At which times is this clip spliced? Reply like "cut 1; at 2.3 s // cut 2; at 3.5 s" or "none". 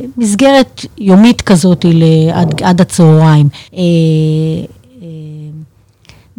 cut 1; at 3.7 s